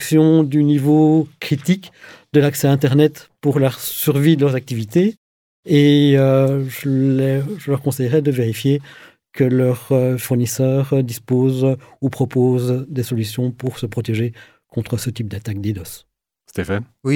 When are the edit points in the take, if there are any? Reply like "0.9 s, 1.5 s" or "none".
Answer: none